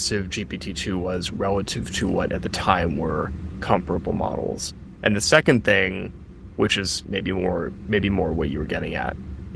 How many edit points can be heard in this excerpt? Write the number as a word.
zero